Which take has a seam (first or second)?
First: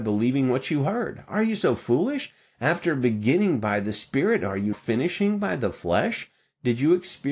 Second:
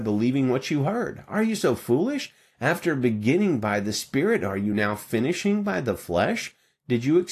first